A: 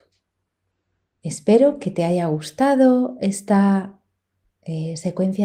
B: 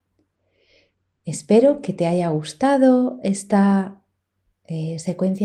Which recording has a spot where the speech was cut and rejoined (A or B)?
A